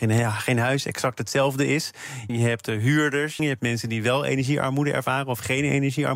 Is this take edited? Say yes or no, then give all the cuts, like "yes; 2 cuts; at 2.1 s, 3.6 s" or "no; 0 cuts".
yes; 2 cuts; at 2.3 s, 3.4 s